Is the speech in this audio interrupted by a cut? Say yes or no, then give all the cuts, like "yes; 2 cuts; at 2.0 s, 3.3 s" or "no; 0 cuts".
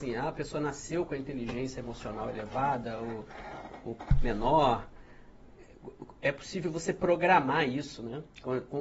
no; 0 cuts